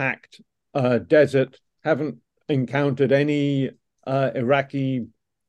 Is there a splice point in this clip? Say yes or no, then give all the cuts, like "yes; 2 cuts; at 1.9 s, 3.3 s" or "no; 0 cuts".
no; 0 cuts